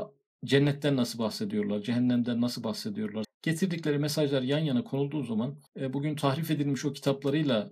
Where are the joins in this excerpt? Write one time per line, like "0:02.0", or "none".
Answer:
0:03.2
0:05.7